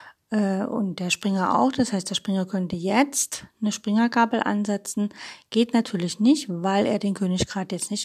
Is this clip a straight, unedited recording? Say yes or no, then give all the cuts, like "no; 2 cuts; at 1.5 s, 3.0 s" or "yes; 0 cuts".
yes; 0 cuts